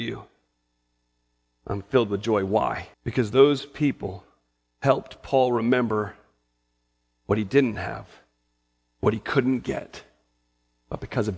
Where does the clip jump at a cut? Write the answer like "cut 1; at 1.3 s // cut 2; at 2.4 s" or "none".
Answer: cut 1; at 2.9 s

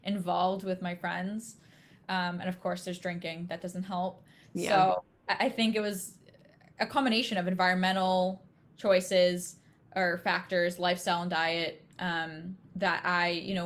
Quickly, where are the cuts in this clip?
none

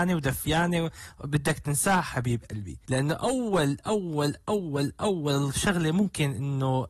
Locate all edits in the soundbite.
none

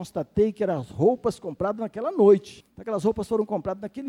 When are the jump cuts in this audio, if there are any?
cut 1; at 2.6 s

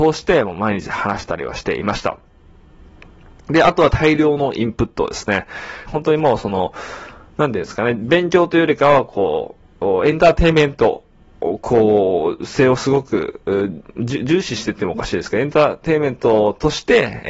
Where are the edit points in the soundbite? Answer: cut 1; at 5.9 s

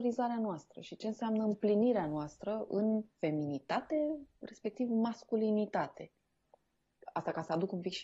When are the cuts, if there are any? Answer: cut 1; at 3.1 s

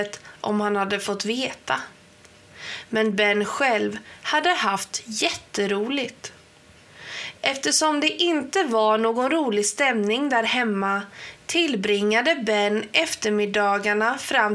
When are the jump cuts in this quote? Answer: none

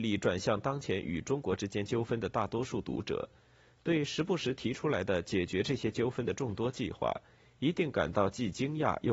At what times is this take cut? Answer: none

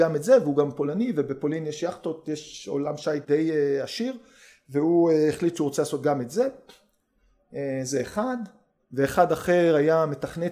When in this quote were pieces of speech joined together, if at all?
none

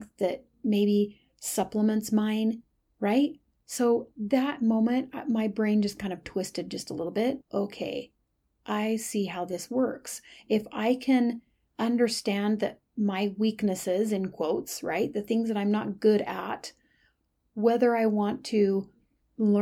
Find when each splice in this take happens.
cut 1; at 7.4 s

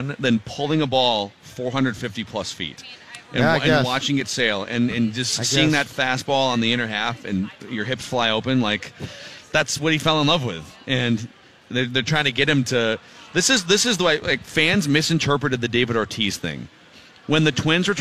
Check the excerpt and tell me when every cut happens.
none

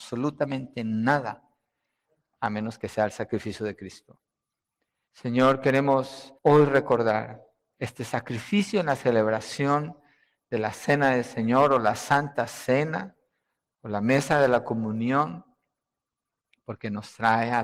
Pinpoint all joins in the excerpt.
cut 1; at 5.1 s // cut 2; at 6.4 s

